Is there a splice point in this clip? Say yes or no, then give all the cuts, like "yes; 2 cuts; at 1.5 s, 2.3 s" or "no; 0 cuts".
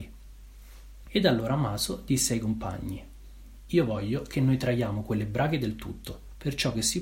yes; 1 cut; at 1.0 s